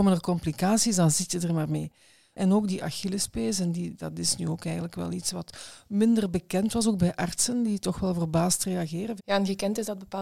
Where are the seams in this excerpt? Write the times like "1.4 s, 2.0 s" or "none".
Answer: 9.2 s